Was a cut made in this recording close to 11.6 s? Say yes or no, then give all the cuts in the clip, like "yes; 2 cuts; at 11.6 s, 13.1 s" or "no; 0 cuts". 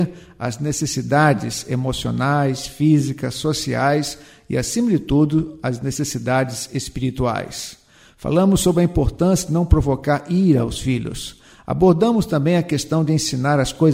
no; 0 cuts